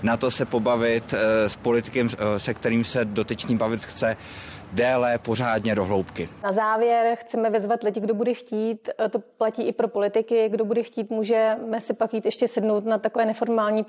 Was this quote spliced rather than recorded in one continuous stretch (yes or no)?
no